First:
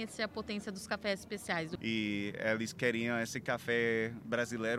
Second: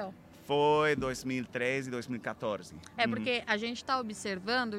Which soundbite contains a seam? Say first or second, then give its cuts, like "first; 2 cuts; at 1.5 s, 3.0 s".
first; 1 cut; at 1.8 s